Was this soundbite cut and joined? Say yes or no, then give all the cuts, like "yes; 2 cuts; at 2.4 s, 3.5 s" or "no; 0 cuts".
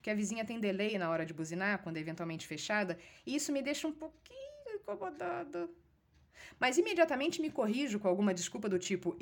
yes; 1 cut; at 6.5 s